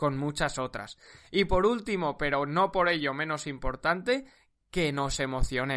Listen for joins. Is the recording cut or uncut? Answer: uncut